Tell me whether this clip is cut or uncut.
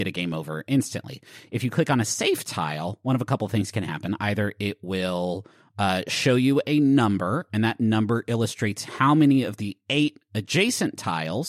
uncut